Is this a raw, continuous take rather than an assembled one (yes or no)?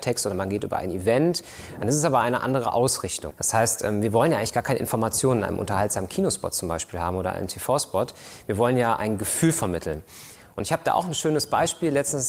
no